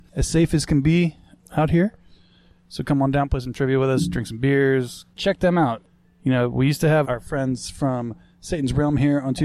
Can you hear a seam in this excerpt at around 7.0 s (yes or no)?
yes